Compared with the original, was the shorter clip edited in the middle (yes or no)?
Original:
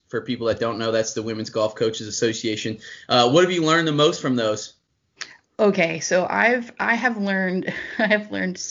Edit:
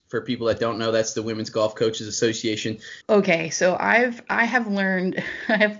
yes